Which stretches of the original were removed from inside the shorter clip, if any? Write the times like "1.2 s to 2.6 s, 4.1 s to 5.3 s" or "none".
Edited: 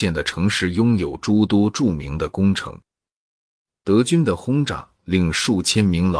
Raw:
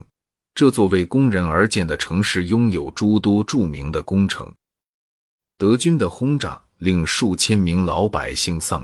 none